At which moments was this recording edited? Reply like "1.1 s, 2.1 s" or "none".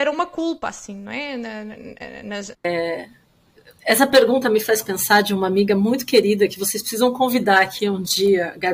2.5 s